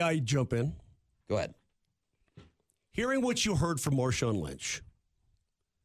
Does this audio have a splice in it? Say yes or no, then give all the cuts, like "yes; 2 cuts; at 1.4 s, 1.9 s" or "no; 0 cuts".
no; 0 cuts